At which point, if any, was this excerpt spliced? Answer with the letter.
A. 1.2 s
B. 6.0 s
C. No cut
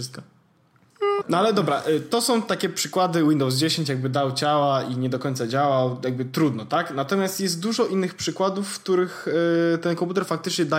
A